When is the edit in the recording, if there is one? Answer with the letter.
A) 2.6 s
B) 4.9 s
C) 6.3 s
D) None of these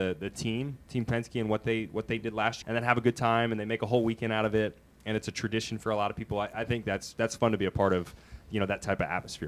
A